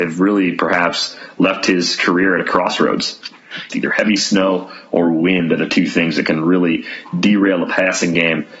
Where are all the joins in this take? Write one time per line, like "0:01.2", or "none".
0:03.7